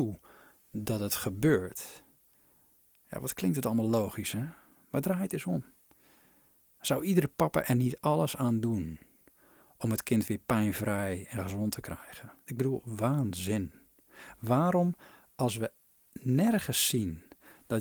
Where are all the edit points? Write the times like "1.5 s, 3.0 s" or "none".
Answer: 12.5 s